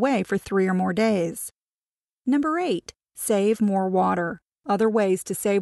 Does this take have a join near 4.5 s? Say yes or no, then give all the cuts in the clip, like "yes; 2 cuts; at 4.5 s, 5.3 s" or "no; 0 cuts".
yes; 1 cut; at 4.5 s